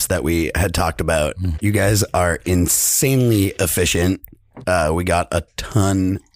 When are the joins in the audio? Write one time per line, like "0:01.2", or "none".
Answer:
0:01.5
0:04.6